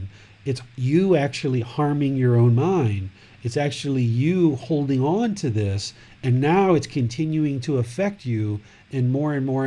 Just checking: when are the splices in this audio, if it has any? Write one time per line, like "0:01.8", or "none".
none